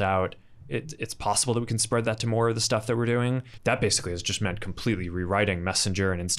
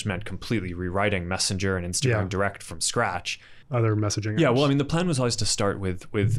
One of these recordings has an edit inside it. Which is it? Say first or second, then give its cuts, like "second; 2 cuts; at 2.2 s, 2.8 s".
first; 1 cut; at 3.6 s